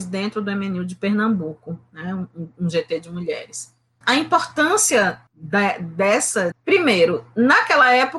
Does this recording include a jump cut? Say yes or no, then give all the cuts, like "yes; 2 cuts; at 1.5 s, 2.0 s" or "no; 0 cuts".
yes; 3 cuts; at 4.0 s, 5.3 s, 6.5 s